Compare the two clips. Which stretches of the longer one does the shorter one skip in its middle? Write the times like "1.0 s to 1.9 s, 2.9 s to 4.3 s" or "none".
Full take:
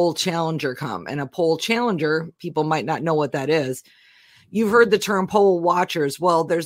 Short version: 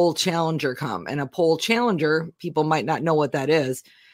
none